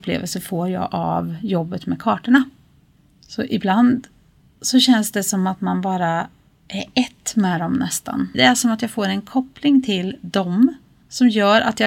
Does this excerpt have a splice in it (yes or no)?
yes